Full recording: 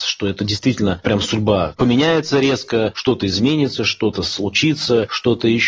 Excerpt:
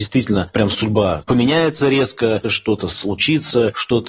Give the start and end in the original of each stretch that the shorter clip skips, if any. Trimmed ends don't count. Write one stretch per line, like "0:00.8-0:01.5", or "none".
0:02.9-0:03.8